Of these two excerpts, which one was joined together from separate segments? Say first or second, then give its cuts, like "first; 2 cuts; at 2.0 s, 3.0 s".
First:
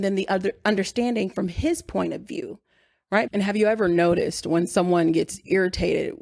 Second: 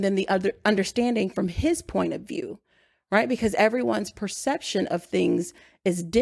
first; 1 cut; at 3.3 s